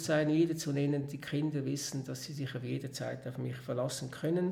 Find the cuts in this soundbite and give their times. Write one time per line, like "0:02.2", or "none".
none